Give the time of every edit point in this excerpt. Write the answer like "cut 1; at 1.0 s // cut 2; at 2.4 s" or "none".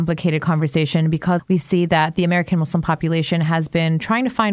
cut 1; at 1.4 s